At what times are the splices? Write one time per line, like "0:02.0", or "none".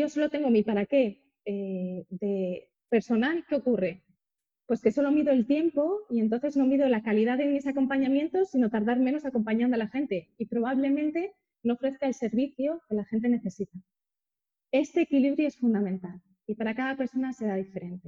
none